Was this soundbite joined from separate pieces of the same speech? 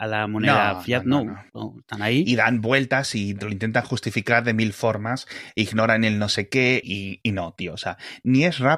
yes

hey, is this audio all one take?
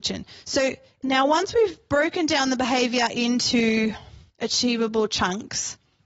no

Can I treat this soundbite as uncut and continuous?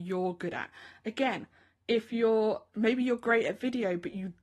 yes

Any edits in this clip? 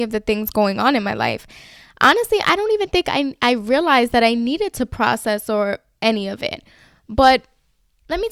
no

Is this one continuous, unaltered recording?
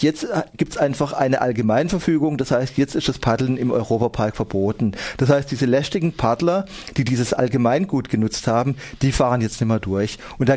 yes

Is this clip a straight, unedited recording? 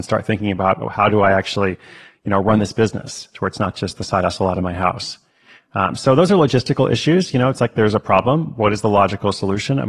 yes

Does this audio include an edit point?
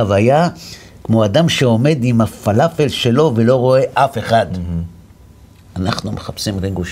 no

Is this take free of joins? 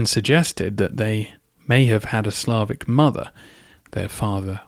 yes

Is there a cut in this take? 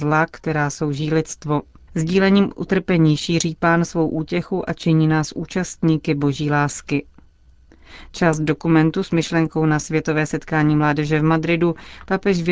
yes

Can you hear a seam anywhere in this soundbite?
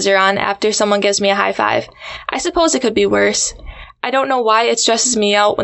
no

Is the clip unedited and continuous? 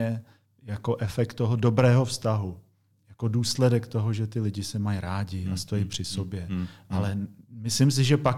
yes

